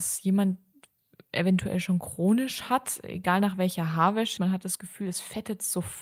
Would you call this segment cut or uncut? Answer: cut